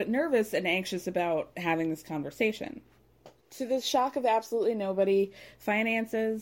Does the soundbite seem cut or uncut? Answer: cut